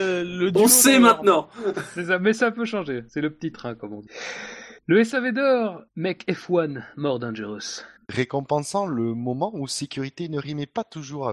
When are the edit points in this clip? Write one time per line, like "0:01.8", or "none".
none